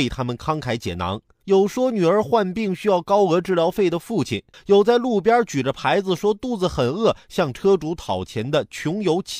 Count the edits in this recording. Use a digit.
2